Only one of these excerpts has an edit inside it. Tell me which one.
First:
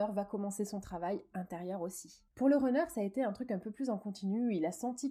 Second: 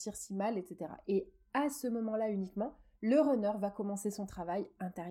first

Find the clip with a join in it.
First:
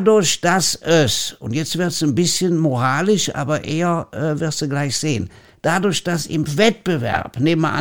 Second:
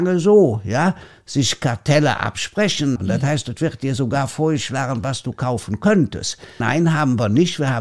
second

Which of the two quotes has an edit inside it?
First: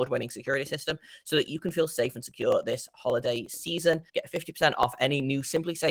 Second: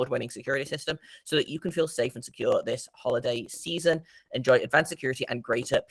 first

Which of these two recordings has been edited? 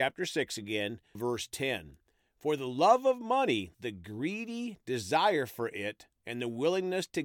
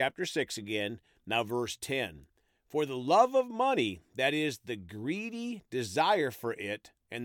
first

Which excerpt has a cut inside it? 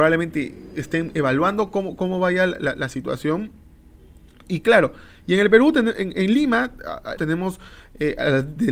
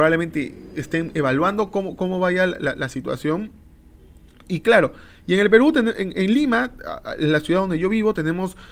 first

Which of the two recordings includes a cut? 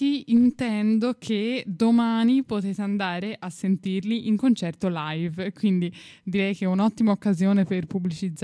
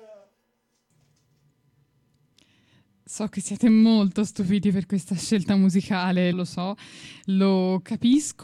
second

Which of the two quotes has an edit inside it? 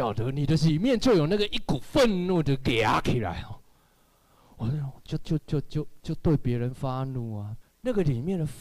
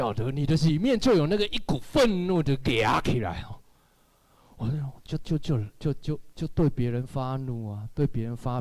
first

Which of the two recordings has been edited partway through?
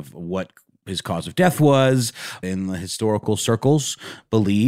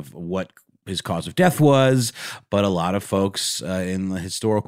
first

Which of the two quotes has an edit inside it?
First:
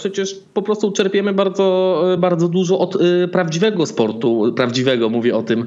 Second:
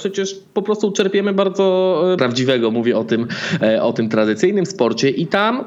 second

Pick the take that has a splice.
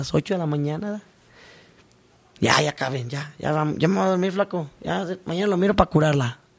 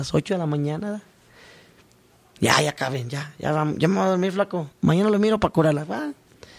second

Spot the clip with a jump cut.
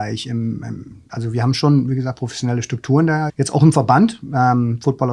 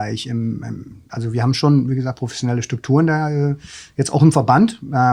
first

